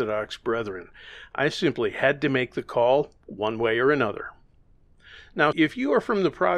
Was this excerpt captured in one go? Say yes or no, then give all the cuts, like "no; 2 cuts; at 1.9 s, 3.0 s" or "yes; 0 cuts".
no; 1 cut; at 5.5 s